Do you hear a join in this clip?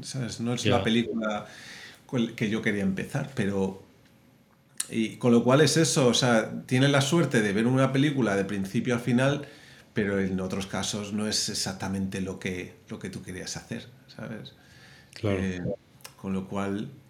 no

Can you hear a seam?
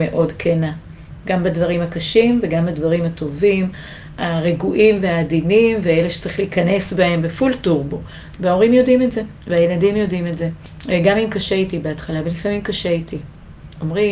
no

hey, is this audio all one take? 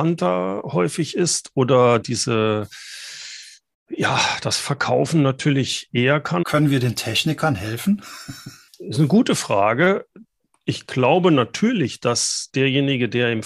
no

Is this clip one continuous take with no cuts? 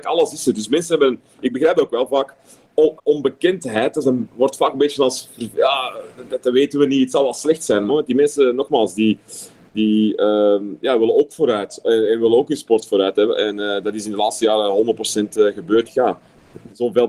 no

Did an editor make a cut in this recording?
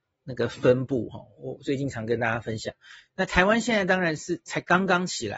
no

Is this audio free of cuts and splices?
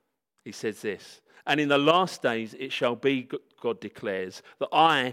yes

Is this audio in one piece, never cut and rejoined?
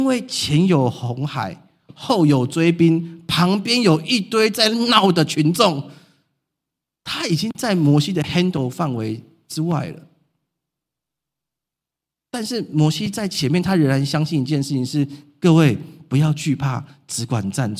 yes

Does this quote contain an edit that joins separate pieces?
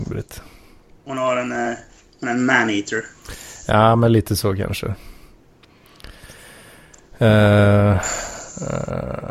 no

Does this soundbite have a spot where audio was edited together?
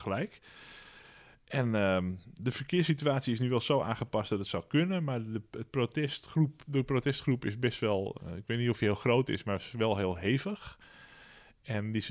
no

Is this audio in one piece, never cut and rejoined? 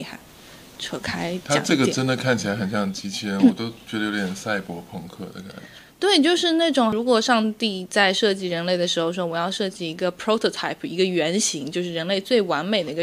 yes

